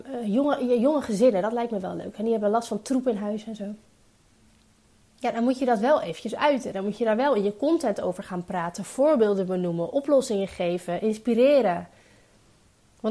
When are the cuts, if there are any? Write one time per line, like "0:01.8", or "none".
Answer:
none